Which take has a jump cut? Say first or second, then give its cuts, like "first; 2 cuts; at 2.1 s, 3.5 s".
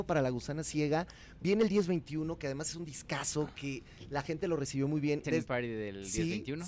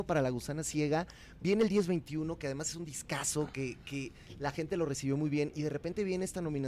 first; 2 cuts; at 3.5 s, 5.2 s